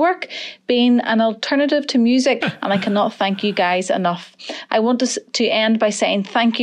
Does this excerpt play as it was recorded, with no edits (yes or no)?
no